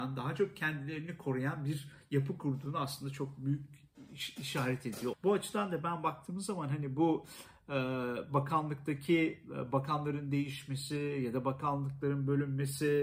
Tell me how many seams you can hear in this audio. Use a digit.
1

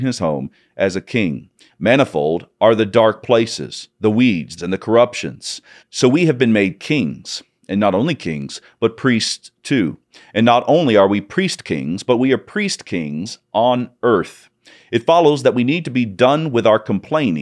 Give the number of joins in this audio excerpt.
3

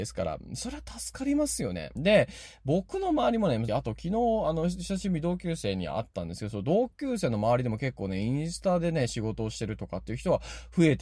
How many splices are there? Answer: 2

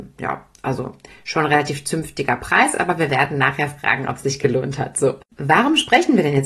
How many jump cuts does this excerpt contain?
0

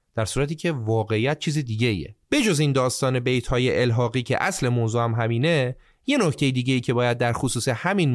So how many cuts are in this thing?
1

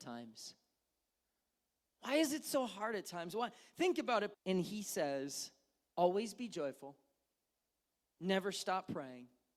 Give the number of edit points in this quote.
1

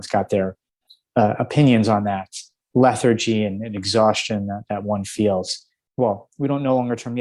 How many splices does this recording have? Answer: 2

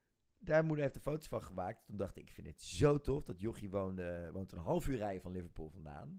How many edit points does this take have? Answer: 0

